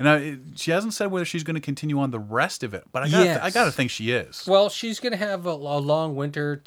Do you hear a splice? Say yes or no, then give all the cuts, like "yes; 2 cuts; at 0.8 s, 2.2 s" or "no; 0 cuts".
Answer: no; 0 cuts